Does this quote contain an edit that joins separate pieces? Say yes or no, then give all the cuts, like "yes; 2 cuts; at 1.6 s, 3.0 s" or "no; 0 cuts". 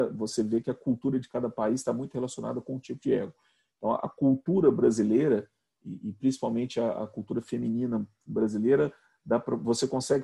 no; 0 cuts